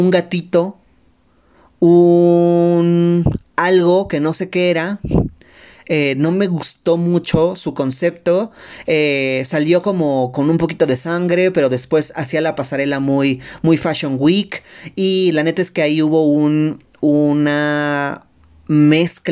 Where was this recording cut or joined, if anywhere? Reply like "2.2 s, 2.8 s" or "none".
none